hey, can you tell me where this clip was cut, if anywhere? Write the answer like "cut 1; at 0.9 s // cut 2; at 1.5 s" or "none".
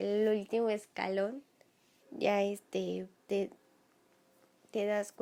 cut 1; at 2.0 s // cut 2; at 3.2 s

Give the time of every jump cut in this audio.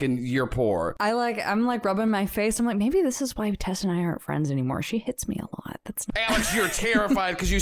cut 1; at 6.1 s

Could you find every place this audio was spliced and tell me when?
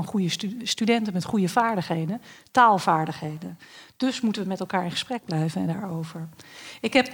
none

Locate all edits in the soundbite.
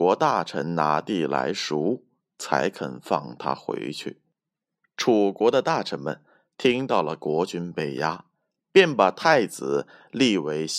none

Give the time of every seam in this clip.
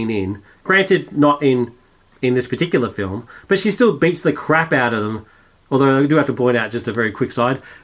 none

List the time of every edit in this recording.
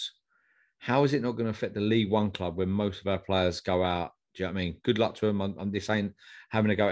none

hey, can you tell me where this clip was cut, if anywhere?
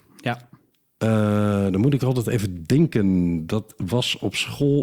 none

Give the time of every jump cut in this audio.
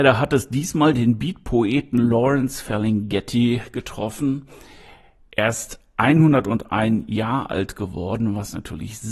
none

